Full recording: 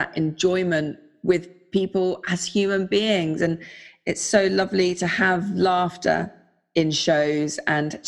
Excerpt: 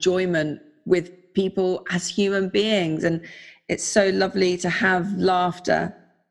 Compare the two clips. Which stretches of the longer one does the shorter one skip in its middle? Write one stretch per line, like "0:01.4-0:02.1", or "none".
none